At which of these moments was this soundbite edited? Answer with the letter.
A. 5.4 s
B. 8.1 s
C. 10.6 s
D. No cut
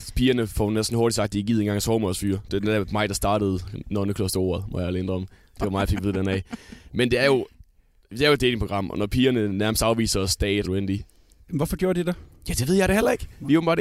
C